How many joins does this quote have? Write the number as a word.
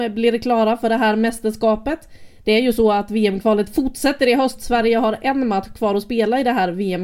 zero